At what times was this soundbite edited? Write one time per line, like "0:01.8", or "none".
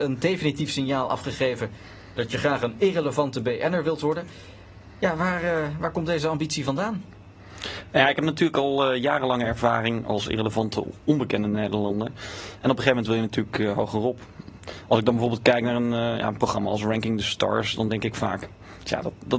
none